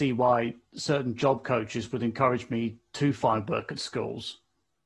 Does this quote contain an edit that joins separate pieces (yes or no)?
no